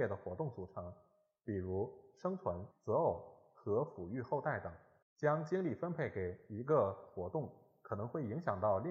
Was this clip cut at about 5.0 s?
yes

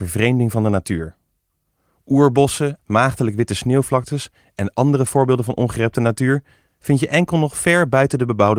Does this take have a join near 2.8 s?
yes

